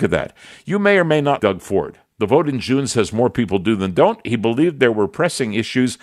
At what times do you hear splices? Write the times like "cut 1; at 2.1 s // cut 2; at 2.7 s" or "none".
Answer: cut 1; at 1.4 s